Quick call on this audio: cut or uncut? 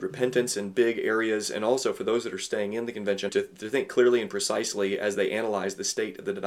cut